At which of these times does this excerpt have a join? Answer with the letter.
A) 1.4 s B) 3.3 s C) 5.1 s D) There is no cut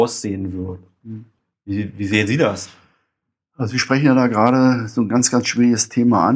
D